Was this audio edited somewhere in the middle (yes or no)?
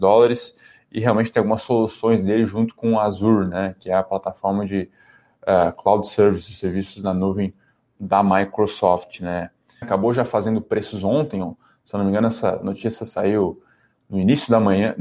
yes